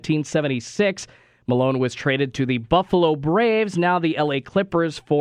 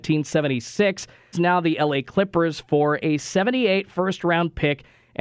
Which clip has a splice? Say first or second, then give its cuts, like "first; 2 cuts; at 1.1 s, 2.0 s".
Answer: second; 1 cut; at 1.3 s